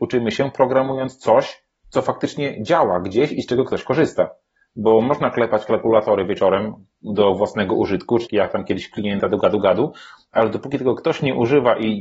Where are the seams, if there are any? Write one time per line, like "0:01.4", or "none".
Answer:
0:08.2